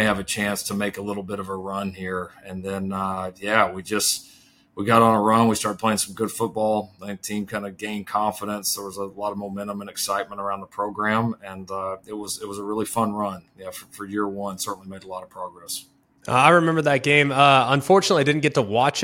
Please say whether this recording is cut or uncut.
uncut